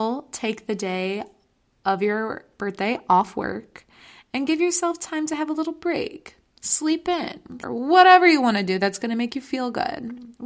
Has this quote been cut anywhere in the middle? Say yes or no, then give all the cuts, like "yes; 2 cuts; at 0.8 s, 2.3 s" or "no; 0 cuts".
yes; 1 cut; at 7.6 s